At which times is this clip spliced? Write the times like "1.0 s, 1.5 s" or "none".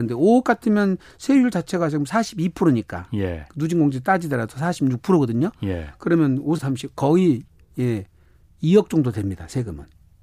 6.6 s